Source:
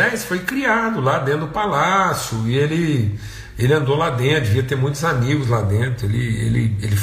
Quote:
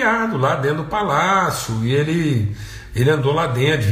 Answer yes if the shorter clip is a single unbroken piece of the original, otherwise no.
yes